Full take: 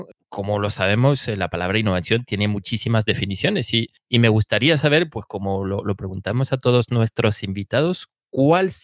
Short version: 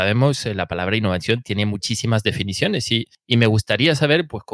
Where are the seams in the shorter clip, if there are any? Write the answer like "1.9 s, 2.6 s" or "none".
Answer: none